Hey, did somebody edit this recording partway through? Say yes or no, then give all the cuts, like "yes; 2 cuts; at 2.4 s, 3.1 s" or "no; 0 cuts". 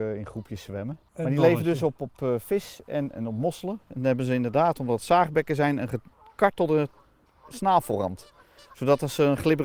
yes; 1 cut; at 3.1 s